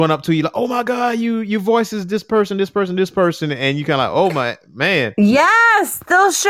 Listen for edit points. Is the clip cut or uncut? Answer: uncut